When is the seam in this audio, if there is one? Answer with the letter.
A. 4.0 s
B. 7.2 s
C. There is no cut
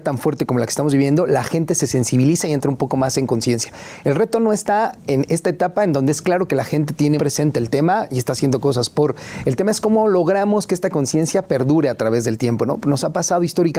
B